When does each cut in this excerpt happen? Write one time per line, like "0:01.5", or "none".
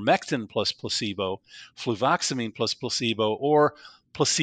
none